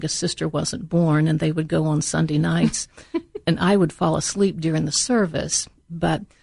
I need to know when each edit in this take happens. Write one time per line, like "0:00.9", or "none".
none